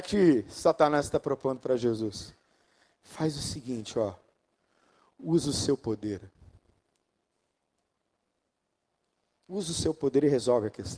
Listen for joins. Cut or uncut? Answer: uncut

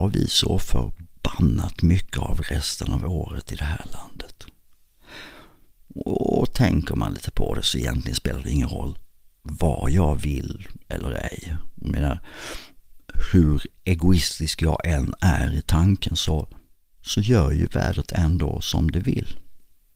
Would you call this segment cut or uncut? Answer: uncut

